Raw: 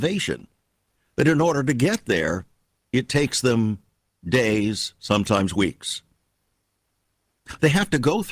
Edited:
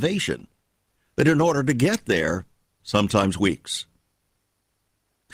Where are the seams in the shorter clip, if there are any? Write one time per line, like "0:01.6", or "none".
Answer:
0:02.8